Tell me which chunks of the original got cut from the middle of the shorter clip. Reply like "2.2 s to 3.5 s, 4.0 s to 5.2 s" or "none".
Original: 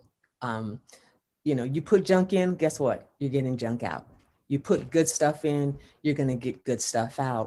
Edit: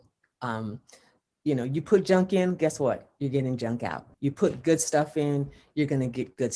4.1 s to 4.4 s

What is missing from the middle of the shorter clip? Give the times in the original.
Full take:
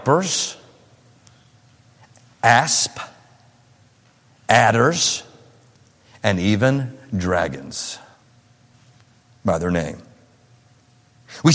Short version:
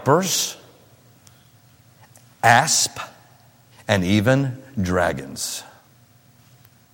3.7 s to 6.1 s

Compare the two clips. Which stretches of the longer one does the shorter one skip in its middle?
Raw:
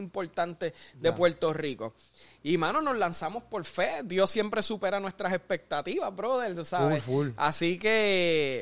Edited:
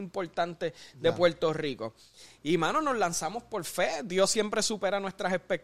none

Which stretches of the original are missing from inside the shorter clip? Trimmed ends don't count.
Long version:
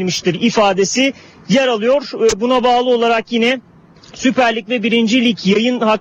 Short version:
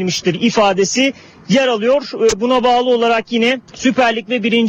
3.7 s to 4.1 s

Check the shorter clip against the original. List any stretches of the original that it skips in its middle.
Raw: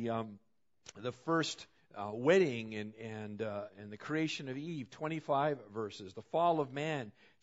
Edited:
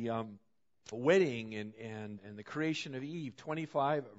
0.9 s to 2.1 s, 3.4 s to 3.7 s

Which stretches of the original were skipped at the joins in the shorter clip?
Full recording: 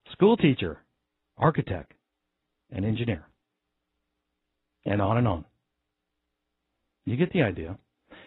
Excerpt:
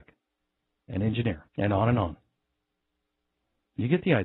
3.3 s to 4.8 s

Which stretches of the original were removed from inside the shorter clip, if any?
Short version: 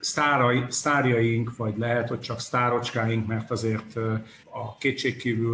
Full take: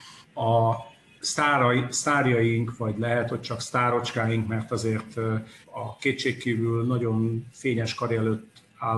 none

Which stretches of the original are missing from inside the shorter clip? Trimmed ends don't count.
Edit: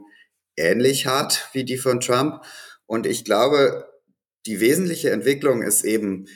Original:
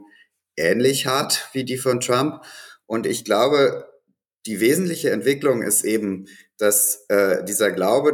none

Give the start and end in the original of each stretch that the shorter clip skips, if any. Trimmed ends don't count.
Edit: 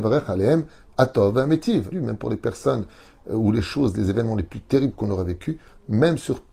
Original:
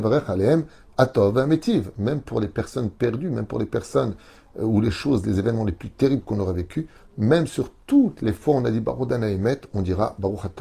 1.9 s to 3.2 s

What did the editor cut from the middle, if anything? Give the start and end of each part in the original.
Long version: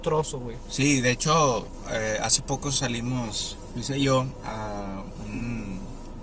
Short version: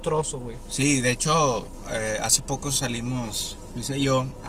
none

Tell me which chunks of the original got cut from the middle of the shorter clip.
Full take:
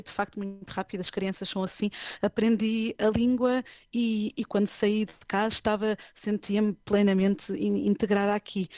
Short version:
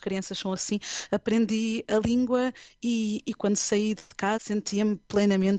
5.5 s to 6.1 s

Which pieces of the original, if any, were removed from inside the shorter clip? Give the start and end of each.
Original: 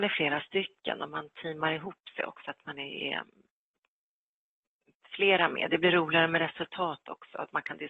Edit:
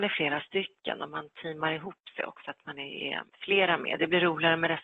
3.3 s to 5.0 s

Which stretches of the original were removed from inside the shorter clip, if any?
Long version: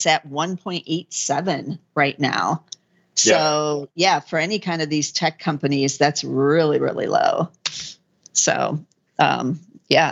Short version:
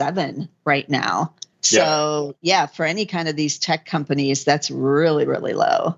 2.8 s to 3.1 s

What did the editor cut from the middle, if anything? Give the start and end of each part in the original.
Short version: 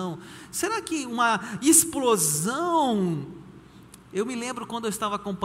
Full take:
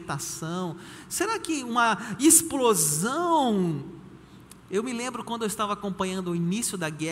none

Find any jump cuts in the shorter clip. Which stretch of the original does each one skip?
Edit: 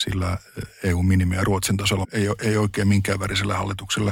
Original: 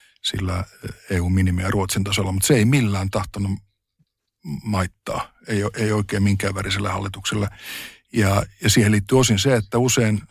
2.3 s to 5.4 s

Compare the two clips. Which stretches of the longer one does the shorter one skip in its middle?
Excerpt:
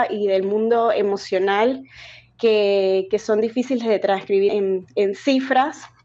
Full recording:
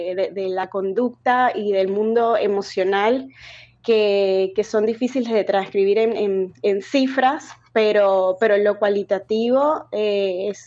5.9 s to 6.2 s

